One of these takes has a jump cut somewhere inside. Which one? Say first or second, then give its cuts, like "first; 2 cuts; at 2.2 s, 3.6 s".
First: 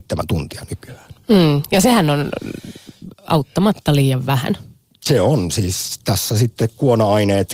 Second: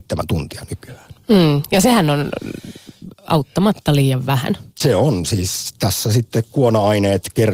second; 1 cut; at 4.7 s